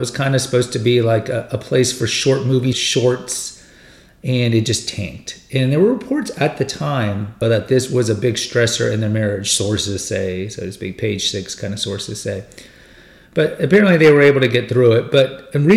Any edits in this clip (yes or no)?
yes